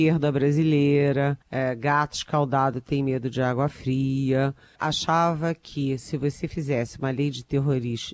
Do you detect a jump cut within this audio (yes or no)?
yes